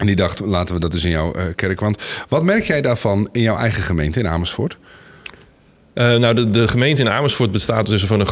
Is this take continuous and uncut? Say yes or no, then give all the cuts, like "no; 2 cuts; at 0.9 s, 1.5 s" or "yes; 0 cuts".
yes; 0 cuts